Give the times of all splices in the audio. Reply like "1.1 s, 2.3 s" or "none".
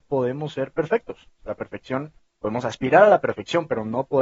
1.4 s